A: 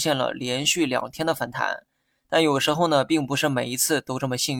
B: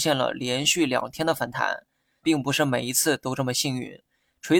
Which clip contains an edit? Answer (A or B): B